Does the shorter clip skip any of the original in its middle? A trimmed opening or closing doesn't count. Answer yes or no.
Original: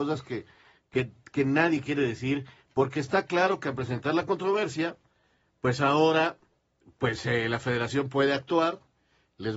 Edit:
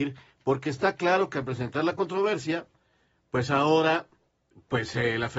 no